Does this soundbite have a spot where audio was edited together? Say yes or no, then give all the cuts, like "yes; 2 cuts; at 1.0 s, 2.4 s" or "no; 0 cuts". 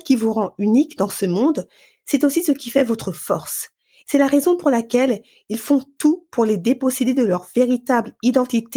yes; 1 cut; at 4.0 s